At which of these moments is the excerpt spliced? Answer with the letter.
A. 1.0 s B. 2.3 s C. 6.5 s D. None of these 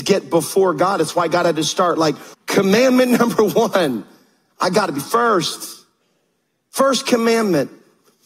B